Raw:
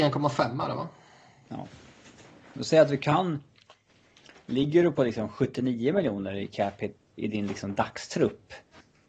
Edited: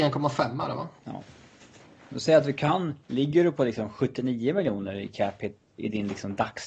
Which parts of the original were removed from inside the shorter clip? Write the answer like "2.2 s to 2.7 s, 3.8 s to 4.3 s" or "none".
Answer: 1.0 s to 1.4 s, 3.5 s to 4.4 s